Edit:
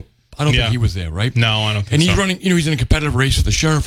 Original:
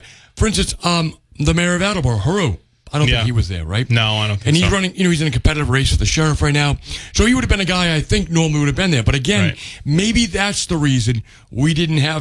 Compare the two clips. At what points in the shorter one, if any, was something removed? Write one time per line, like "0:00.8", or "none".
none